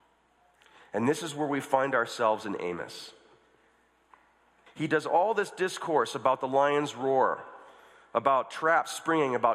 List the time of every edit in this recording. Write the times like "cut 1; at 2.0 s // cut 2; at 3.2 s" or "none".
cut 1; at 4.7 s